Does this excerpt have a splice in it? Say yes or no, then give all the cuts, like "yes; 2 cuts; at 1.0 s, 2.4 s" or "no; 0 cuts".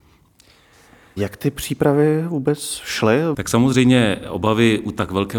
yes; 1 cut; at 3.3 s